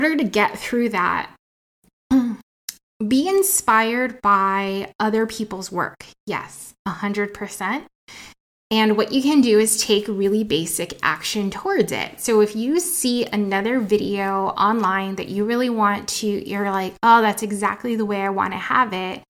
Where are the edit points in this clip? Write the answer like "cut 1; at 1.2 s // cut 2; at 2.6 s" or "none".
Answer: none